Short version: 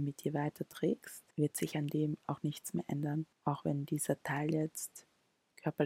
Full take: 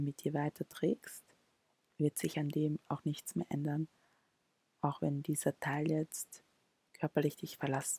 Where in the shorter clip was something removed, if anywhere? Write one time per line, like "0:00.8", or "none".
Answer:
0:01.3
0:03.3